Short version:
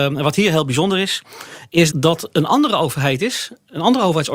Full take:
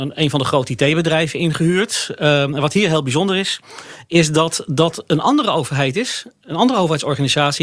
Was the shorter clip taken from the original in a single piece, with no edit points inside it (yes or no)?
no